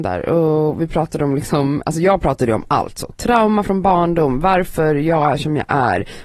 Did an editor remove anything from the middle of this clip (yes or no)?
no